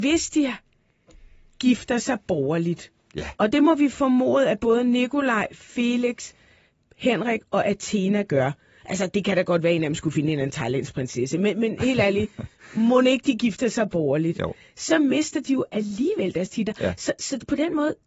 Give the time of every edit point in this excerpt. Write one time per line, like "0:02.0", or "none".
none